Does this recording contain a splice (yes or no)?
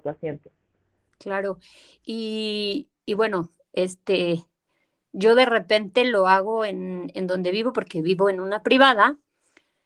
no